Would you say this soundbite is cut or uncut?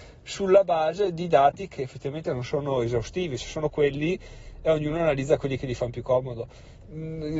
cut